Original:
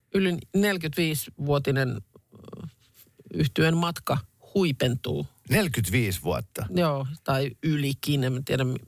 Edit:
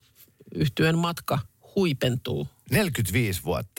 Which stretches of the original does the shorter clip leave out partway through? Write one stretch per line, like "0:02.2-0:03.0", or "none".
none